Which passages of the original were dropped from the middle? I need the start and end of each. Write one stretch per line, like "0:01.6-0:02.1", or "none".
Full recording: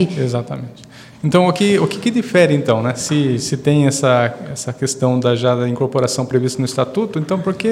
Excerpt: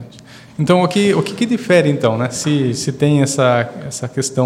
none